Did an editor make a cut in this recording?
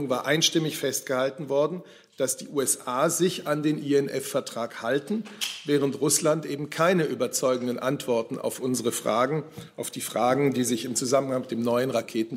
no; 0 cuts

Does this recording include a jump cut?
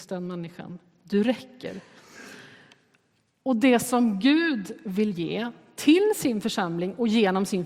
no; 0 cuts

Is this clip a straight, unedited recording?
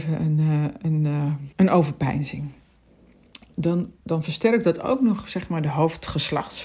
no; 2 cuts; at 1.5 s, 3.5 s

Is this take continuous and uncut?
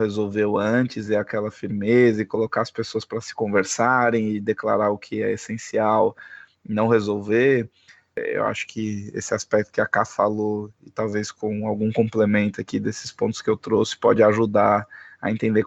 yes; 0 cuts

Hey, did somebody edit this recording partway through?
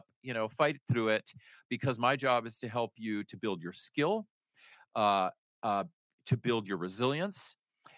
no; 0 cuts

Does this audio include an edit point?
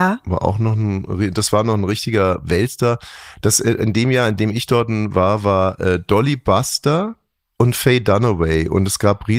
no; 0 cuts

